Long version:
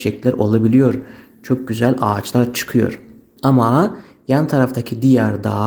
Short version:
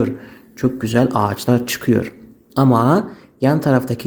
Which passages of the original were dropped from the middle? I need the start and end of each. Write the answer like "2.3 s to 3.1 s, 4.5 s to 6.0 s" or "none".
none